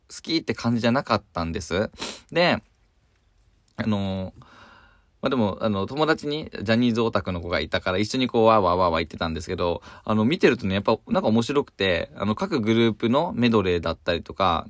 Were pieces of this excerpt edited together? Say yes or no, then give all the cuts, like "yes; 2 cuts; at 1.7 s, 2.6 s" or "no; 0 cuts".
no; 0 cuts